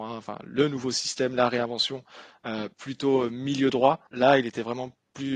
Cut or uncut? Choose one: cut